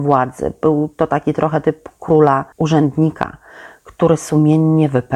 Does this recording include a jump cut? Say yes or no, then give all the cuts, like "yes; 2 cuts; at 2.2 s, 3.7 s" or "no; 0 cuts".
yes; 1 cut; at 2.5 s